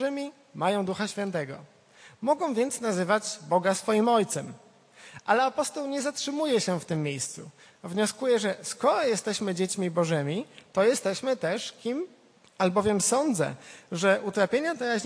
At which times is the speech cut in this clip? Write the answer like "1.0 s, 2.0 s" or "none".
12.4 s